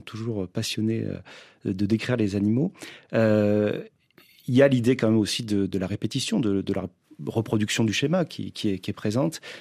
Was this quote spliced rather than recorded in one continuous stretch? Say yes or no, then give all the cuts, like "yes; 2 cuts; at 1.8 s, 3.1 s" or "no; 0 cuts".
yes; 1 cut; at 5.7 s